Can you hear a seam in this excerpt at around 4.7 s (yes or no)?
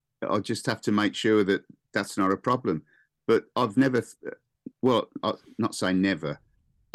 no